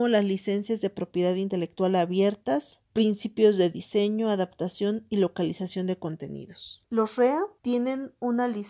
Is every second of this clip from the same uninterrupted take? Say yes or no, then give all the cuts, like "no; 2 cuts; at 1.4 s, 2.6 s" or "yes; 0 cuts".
yes; 0 cuts